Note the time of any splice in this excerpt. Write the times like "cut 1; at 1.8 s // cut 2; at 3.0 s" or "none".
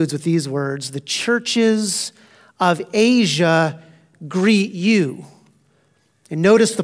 none